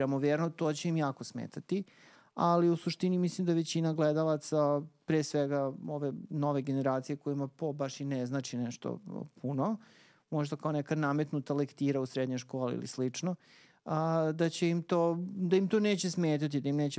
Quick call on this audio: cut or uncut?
uncut